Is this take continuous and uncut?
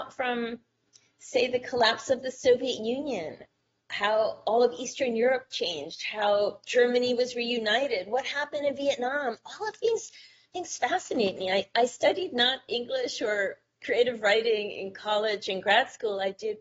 yes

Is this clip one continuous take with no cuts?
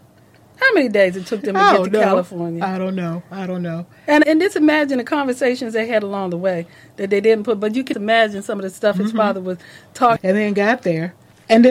no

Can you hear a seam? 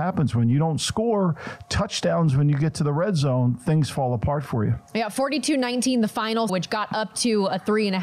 yes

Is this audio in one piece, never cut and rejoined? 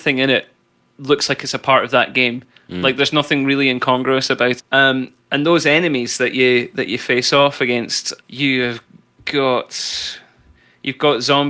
no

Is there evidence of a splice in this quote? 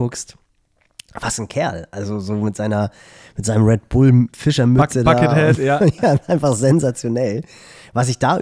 no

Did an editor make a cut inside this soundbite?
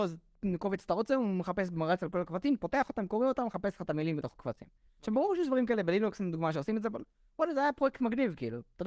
no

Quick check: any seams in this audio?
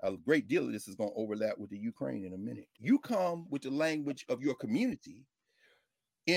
yes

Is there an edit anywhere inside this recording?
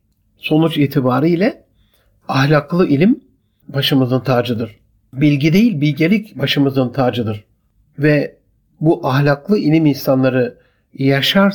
no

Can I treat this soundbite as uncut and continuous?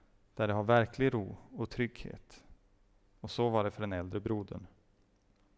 yes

